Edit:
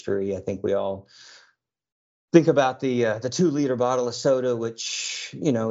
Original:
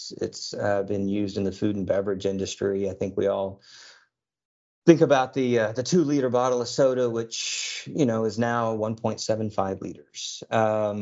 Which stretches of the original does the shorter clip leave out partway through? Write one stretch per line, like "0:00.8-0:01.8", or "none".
none